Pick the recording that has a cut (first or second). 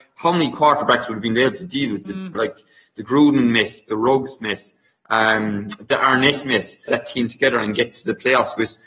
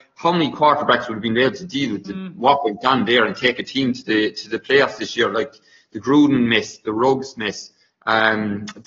first